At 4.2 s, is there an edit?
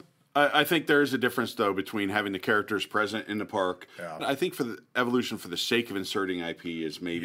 yes; 1 cut; at 4.2 s

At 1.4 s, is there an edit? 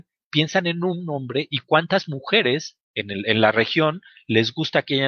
no; 1 cut; at 2.8 s

